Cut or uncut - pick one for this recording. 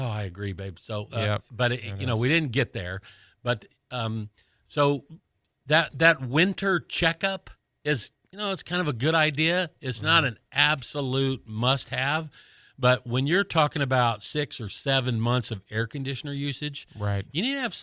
uncut